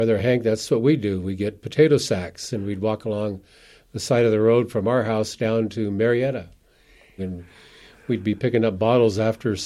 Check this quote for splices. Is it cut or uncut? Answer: cut